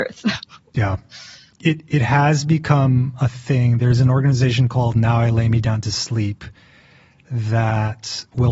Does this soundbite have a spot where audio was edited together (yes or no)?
no